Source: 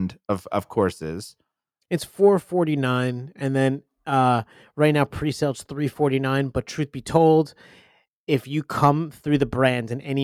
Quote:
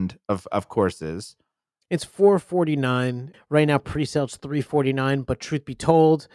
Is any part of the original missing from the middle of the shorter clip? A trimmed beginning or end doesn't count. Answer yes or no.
yes